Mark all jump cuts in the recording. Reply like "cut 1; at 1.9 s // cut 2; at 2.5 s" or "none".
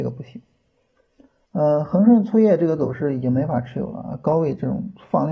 cut 1; at 1.5 s